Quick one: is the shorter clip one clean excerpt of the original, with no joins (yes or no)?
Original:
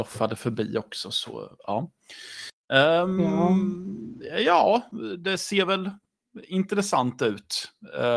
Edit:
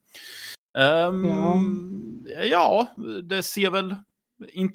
yes